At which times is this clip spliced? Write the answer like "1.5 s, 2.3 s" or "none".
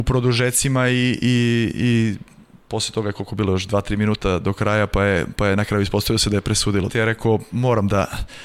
6.9 s